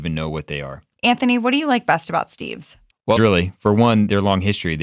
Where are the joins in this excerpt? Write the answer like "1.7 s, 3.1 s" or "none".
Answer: 0.9 s, 3.2 s

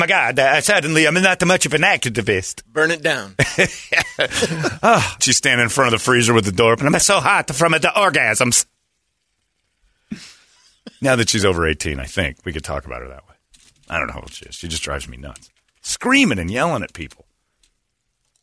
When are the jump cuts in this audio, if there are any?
5.2 s

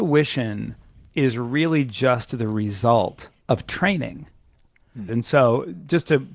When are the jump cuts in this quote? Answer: 3.4 s, 5.1 s

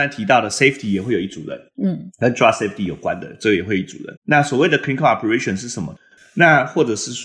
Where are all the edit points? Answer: 4.2 s, 6.2 s

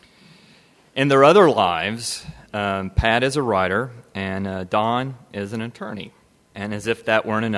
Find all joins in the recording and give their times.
none

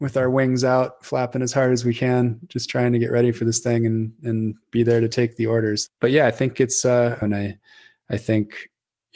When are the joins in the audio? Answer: 5.9 s, 7.2 s

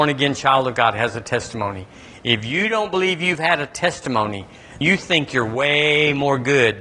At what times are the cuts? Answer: 4.8 s

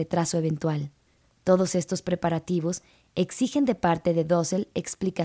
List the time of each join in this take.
1.2 s

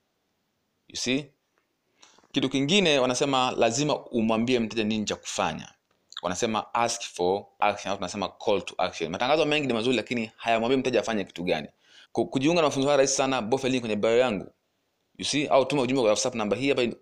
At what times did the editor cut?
12.0 s

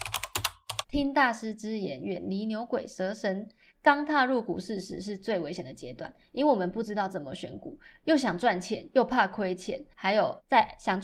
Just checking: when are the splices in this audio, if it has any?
9.9 s

